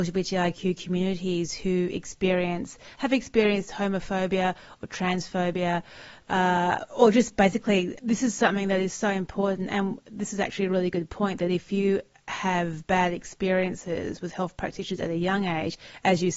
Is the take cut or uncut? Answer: cut